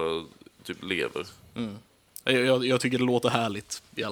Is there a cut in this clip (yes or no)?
no